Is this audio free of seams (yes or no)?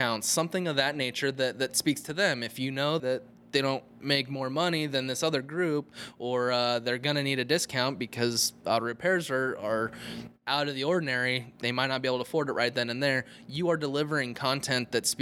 no